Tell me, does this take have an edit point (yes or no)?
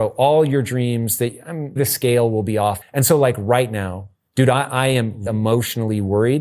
yes